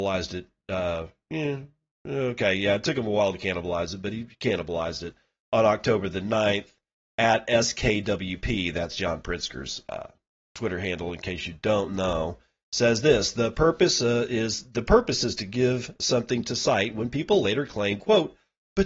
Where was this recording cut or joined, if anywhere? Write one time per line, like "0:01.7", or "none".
none

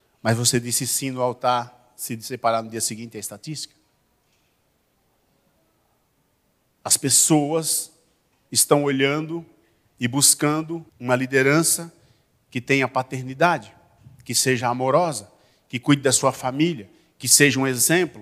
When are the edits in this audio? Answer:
0:10.9

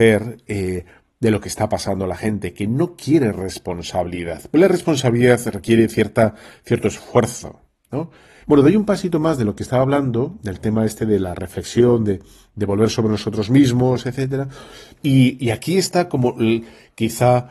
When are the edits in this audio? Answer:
0:08.4
0:15.0

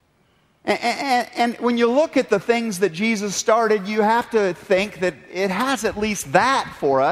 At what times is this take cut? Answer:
none

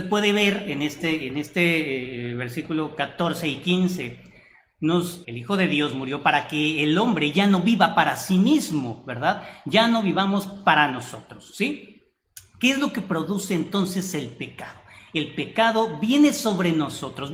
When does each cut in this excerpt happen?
0:05.2

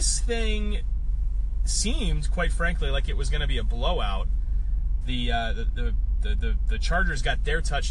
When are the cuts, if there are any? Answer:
0:05.0

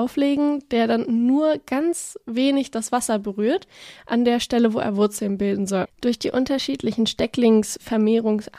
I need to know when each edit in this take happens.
0:05.8

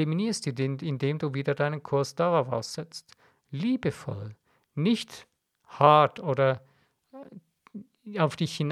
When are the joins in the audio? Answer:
none

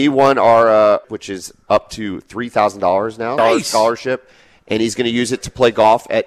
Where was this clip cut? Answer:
0:01.0
0:03.4

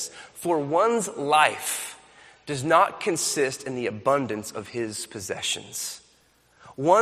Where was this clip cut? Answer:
none

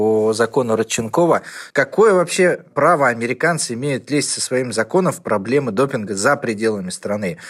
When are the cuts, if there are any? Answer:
0:01.7

